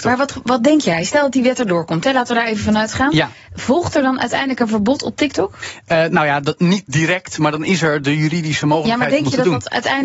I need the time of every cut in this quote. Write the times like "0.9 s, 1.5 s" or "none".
none